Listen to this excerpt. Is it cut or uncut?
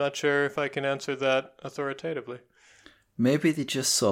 uncut